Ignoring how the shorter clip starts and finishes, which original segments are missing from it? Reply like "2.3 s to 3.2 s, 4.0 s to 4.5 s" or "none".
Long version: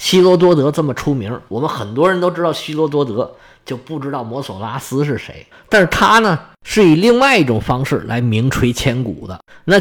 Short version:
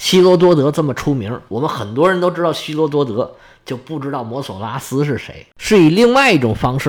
5.5 s to 6.6 s